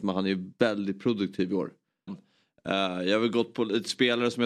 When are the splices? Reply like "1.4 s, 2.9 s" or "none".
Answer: 2.1 s